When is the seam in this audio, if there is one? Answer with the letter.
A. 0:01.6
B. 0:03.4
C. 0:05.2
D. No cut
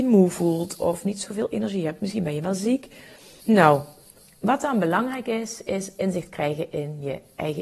B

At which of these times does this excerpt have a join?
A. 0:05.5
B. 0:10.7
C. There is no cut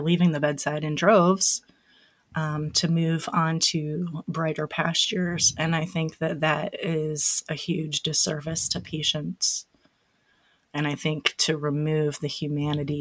B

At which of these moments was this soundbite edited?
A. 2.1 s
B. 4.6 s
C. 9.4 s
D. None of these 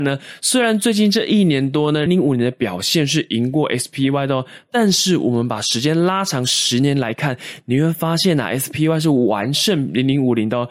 A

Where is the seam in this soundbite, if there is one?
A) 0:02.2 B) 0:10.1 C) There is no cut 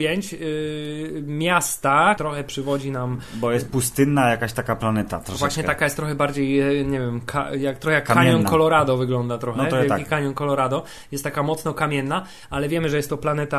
A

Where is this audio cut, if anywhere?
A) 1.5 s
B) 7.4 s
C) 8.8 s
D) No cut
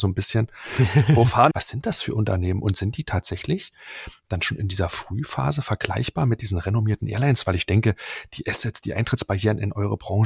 A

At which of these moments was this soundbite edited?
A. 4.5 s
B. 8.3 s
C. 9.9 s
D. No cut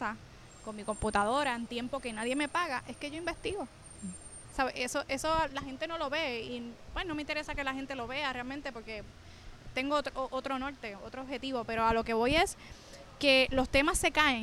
D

